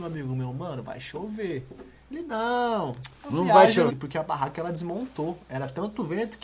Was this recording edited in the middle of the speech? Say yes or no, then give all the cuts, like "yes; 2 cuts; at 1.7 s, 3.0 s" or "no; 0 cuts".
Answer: yes; 1 cut; at 3.9 s